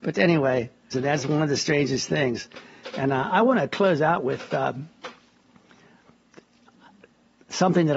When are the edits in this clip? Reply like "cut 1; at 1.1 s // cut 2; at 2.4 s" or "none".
cut 1; at 0.9 s